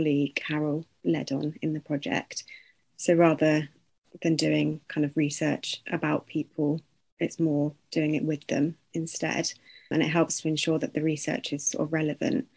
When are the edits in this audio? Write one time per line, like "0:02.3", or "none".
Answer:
0:02.8